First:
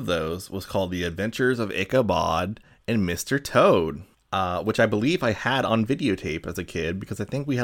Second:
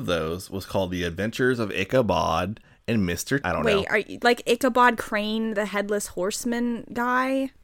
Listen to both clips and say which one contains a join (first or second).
second